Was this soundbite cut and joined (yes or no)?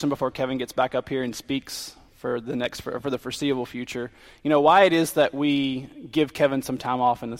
no